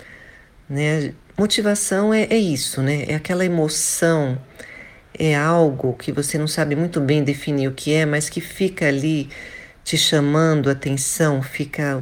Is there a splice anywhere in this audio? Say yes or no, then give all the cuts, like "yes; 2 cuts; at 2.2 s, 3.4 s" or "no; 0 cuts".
no; 0 cuts